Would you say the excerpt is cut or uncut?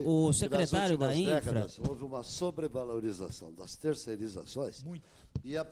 uncut